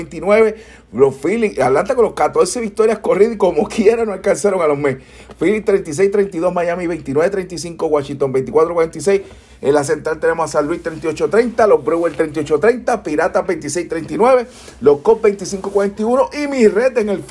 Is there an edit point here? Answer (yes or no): no